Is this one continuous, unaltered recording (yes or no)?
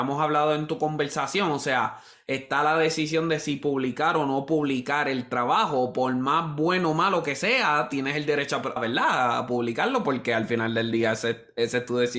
no